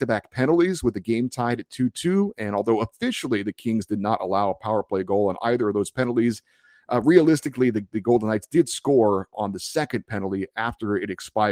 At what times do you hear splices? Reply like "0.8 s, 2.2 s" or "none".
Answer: 9.3 s